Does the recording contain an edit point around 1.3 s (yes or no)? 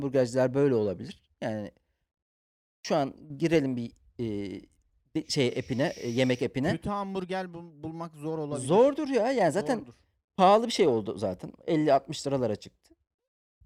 no